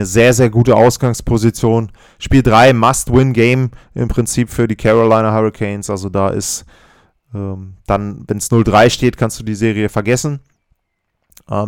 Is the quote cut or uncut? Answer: uncut